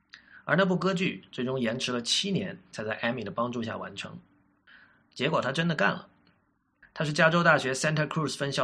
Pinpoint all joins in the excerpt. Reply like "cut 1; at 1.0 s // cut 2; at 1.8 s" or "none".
cut 1; at 4.7 s // cut 2; at 6.8 s